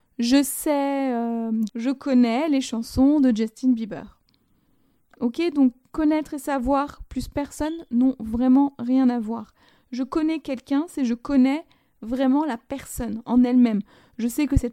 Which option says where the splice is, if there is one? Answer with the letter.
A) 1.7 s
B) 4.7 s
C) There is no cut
A